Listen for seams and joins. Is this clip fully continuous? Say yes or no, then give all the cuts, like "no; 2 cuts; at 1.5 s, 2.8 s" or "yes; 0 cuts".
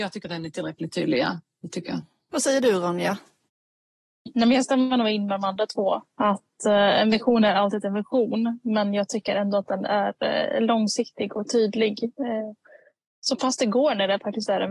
no; 1 cut; at 2.3 s